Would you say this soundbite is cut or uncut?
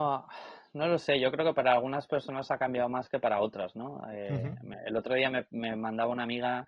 uncut